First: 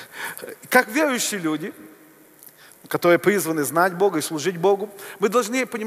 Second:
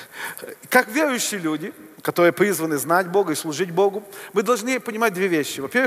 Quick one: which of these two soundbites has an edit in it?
second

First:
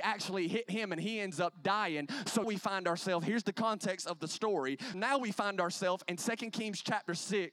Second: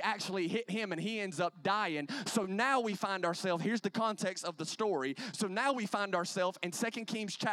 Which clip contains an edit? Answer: first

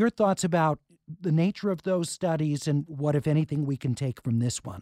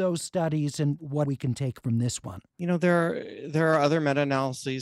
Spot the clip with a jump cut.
second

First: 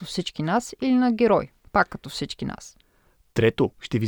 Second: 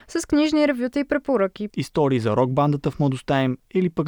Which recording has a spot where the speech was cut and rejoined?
second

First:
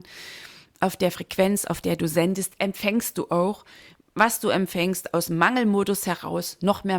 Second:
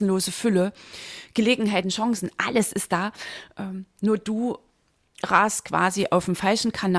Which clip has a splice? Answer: second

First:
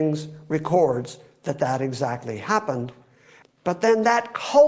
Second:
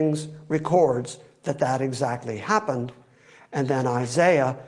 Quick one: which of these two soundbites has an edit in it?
first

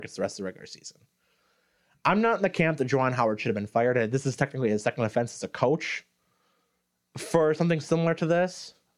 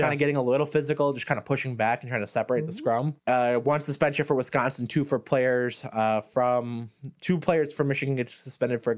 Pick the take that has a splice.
second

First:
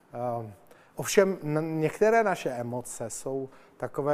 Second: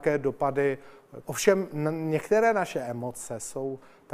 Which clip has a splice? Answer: second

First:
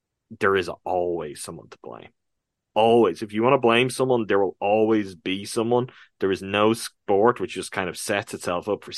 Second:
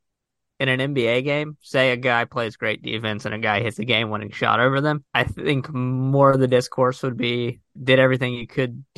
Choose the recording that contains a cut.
second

